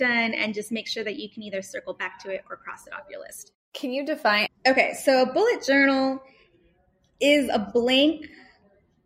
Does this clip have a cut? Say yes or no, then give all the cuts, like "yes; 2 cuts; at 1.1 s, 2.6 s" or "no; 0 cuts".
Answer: yes; 1 cut; at 4.5 s